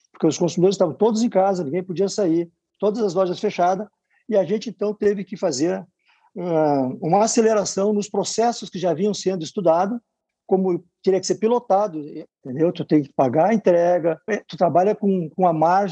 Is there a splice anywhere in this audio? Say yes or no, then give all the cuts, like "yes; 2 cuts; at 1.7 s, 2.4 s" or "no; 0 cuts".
yes; 2 cuts; at 12.3 s, 14.3 s